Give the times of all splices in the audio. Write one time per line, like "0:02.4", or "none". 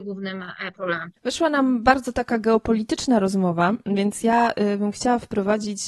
0:01.2